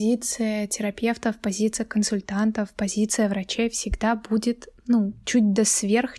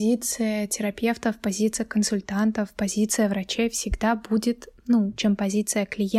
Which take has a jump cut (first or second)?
second